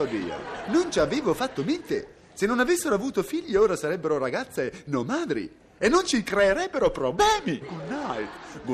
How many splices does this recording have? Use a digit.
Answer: 1